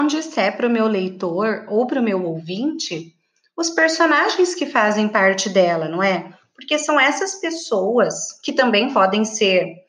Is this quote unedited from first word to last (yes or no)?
yes